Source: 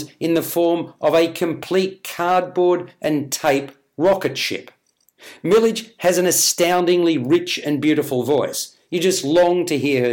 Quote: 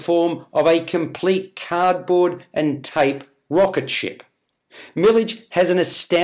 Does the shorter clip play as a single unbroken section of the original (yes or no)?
yes